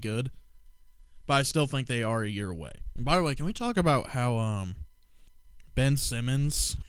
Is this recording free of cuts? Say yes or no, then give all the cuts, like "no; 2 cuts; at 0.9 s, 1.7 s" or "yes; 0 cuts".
yes; 0 cuts